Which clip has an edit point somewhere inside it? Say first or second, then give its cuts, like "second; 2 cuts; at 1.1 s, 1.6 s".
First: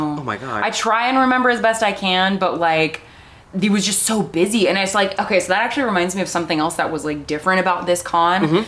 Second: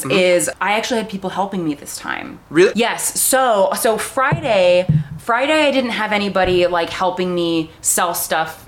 second; 1 cut; at 2.7 s